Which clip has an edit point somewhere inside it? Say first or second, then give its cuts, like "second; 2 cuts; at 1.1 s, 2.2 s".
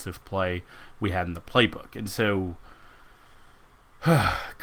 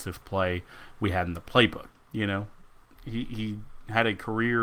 second; 1 cut; at 1.9 s